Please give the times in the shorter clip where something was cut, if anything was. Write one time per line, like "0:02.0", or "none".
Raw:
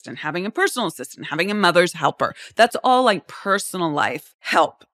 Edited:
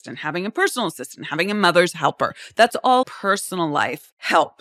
0:03.0

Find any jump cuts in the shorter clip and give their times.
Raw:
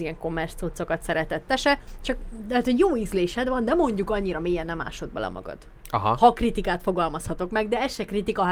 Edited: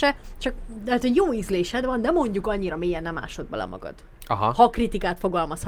none

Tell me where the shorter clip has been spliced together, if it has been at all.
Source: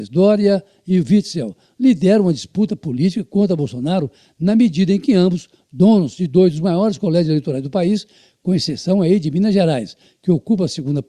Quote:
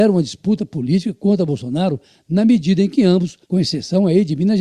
0:03.4

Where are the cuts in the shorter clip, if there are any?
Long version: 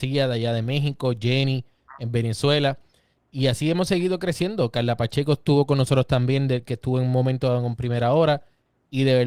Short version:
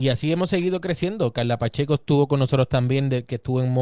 none

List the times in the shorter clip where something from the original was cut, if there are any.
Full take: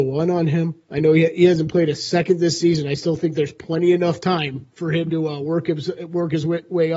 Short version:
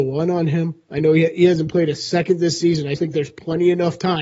0:02.9

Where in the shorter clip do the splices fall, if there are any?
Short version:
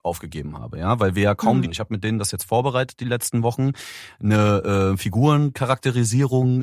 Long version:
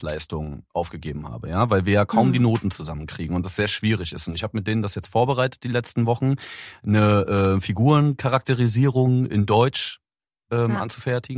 0:01.6

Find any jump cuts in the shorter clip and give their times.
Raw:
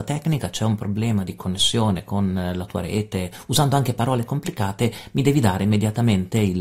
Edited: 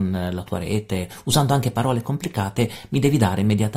none

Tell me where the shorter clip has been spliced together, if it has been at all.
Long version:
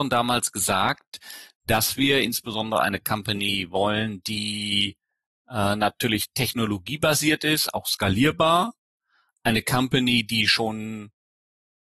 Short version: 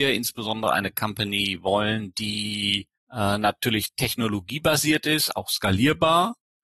0:03.0

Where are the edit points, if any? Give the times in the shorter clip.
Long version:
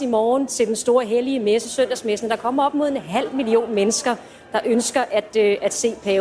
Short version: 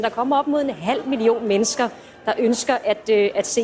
none

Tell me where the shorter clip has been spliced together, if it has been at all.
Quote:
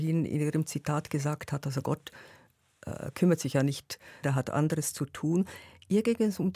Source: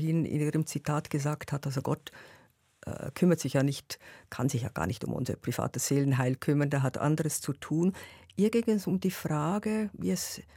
0:04.2

